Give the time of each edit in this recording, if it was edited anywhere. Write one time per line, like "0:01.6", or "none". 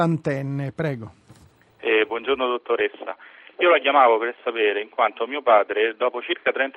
none